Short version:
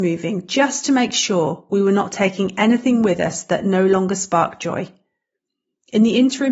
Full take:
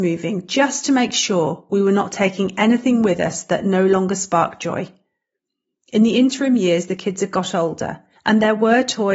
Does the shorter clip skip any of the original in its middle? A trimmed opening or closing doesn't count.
no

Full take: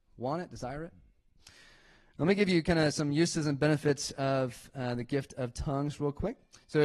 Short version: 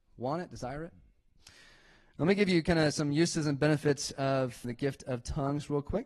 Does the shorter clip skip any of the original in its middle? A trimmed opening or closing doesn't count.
yes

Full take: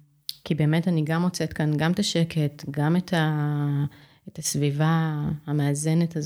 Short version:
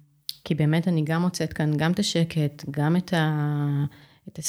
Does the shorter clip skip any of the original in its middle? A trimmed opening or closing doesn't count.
no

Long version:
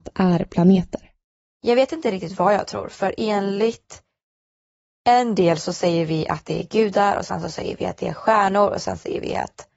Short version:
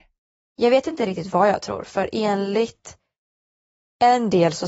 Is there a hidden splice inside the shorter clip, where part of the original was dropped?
no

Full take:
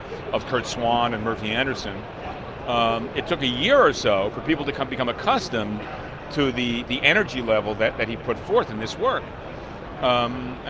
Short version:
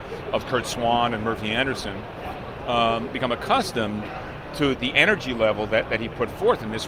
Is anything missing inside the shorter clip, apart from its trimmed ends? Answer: yes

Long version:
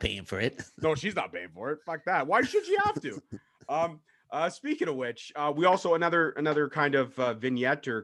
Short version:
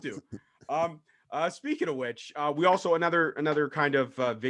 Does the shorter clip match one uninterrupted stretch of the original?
yes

